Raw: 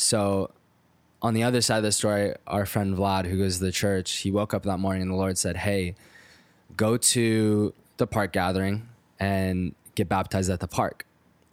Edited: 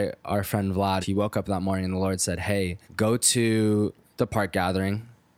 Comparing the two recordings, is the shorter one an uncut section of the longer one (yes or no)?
no